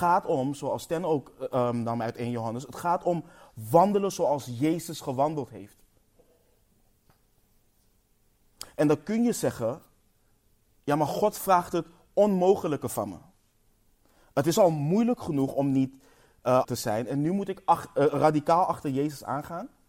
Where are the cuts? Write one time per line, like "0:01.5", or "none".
0:16.6